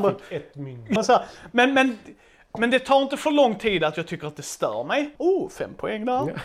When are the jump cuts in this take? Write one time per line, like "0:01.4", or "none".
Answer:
0:01.0
0:05.2